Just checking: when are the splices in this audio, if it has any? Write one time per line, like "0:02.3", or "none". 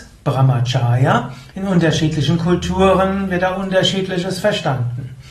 0:01.5